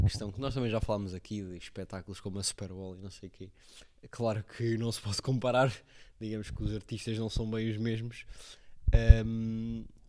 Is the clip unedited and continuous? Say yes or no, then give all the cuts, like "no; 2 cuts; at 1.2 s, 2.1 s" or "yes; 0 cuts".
yes; 0 cuts